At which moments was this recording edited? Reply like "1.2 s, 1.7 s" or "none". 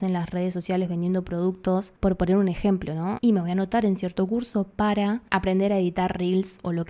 3.2 s